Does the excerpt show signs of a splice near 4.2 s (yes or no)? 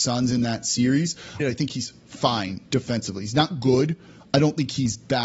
no